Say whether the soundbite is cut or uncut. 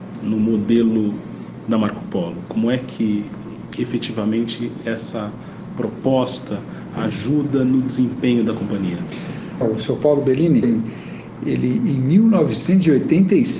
cut